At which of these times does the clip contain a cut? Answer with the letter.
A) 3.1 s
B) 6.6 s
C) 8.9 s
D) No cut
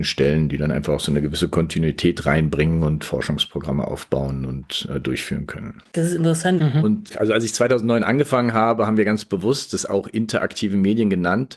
B